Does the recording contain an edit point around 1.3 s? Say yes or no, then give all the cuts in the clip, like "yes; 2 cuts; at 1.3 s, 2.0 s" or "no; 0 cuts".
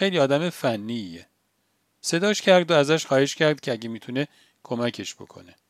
no; 0 cuts